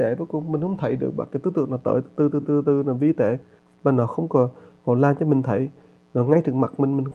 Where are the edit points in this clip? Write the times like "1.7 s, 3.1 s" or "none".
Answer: none